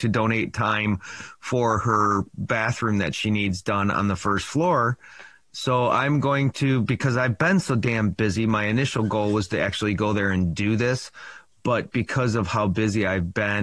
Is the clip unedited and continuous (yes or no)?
yes